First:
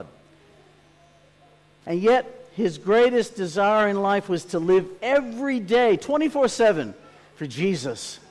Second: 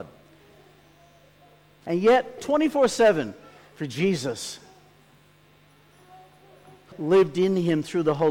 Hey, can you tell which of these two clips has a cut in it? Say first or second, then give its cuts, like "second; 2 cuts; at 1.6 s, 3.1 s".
second; 2 cuts; at 2.4 s, 6.9 s